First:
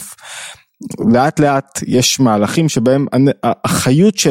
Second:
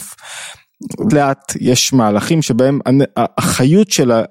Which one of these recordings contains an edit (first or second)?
second